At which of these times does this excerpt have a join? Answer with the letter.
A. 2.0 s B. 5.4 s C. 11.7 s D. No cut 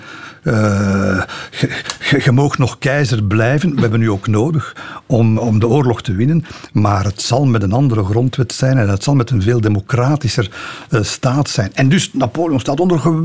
B